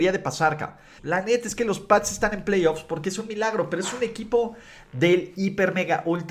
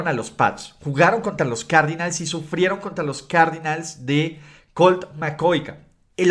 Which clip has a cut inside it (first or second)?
first